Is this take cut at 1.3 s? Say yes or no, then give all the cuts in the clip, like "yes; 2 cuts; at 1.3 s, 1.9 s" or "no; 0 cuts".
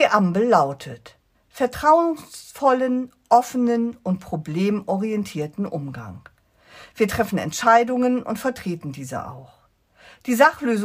yes; 1 cut; at 1.3 s